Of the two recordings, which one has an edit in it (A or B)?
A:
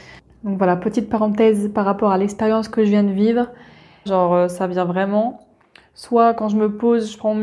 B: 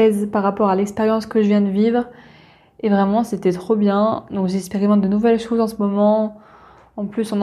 A